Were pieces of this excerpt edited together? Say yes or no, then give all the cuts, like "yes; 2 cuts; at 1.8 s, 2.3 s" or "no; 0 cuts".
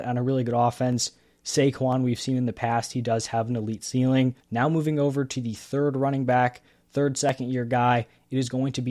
yes; 1 cut; at 4.4 s